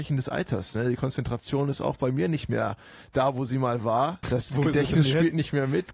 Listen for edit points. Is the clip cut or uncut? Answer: cut